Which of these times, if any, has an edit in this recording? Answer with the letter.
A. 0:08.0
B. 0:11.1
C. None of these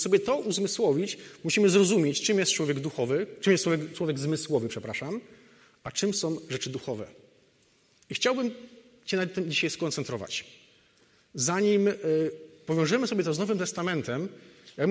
C